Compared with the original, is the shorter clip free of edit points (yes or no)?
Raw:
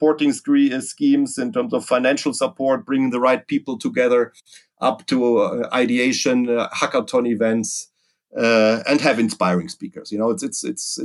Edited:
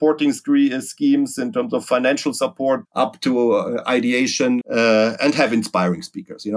no